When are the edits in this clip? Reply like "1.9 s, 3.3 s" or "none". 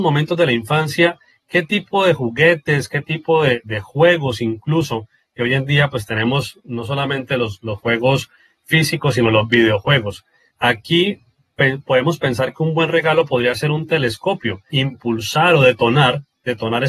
10.5 s, 14.7 s

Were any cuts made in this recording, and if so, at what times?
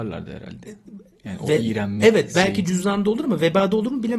none

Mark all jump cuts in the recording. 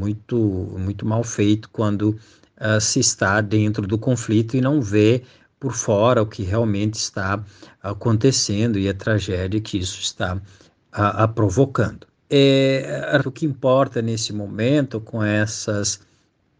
12.1 s, 13.2 s

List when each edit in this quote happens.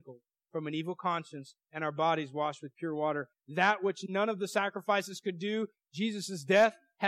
none

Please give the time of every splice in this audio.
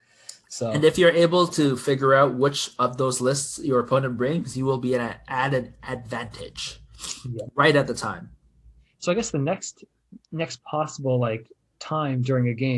none

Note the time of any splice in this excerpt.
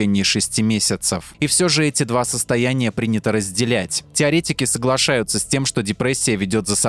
1.3 s

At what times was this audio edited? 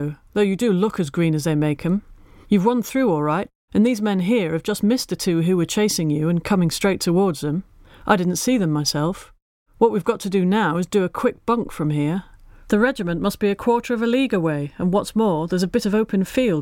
none

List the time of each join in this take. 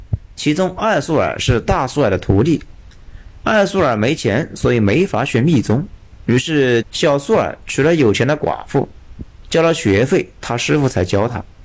6.8 s

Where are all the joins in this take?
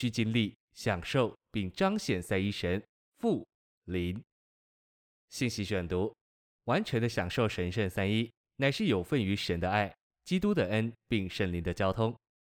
3.7 s

